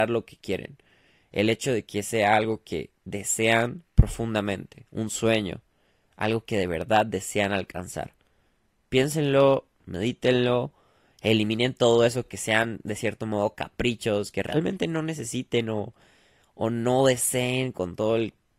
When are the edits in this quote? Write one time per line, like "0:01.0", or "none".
none

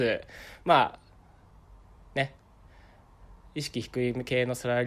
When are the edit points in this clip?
none

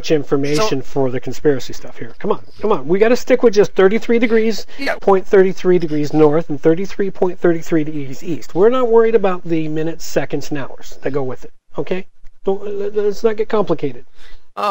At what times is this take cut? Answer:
0:05.0

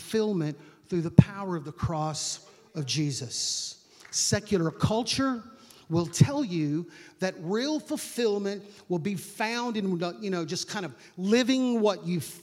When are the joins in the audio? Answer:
none

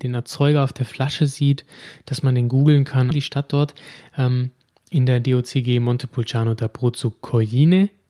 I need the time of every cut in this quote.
0:03.1

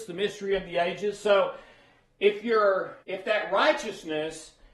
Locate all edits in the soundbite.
0:03.0

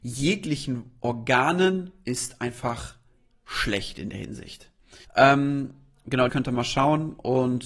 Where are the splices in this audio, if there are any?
0:05.0
0:06.3

